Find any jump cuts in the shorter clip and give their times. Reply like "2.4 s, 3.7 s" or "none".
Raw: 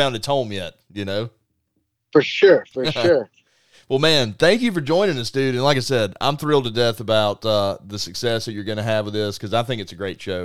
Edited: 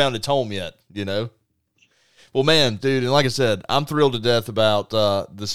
1.7 s, 2.8 s